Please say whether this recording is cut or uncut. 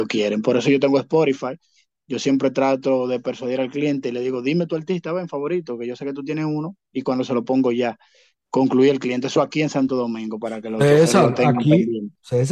uncut